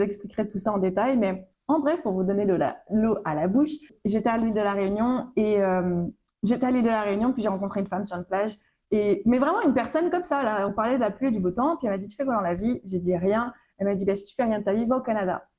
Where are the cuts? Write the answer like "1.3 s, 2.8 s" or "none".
none